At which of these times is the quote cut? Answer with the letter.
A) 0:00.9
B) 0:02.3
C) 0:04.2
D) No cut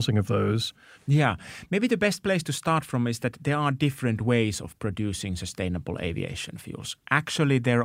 A